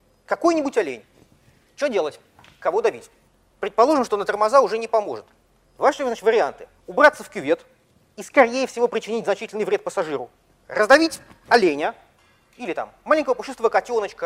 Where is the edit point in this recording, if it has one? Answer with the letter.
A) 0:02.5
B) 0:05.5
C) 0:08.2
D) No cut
D